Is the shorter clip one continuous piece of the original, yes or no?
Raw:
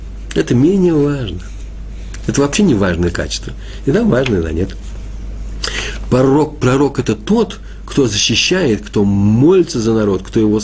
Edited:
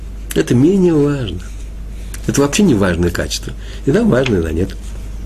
yes